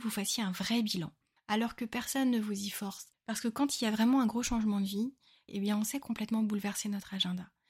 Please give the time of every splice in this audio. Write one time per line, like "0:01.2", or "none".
0:01.4
0:05.5